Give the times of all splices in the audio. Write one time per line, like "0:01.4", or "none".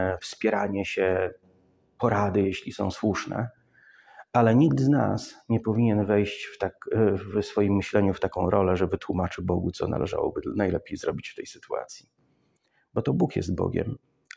none

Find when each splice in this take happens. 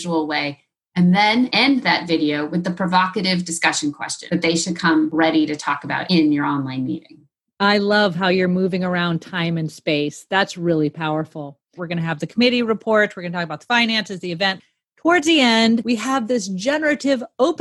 0:11.8

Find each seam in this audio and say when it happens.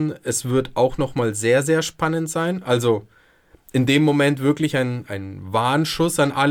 0:05.0

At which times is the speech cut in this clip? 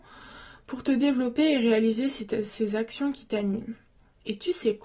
none

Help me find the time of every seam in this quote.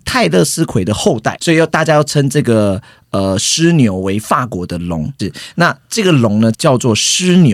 0:05.2
0:06.5

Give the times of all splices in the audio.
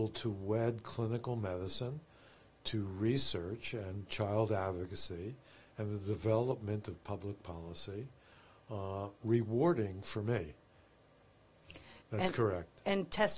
0:09.2
0:12.0

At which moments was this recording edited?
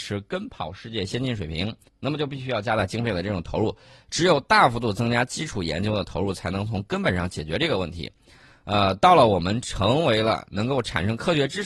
0:01.9

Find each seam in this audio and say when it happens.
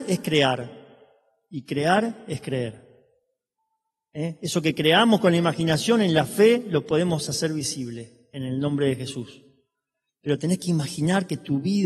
none

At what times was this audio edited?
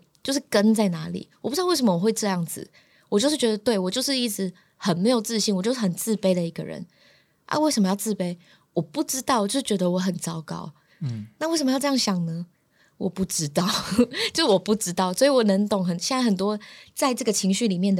none

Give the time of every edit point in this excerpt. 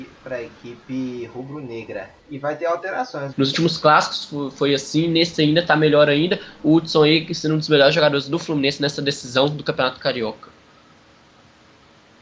0:02.2
0:03.3

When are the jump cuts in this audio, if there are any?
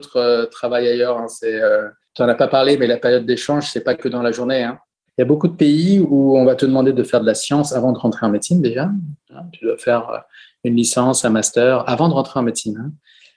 0:05.1

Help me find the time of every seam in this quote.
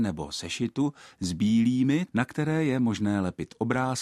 0:02.1

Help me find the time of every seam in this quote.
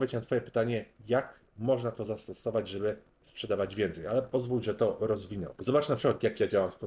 0:05.6

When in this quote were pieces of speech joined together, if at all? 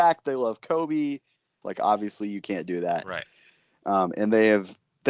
0:01.6

